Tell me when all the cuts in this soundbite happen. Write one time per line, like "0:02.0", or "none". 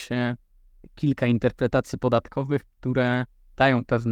none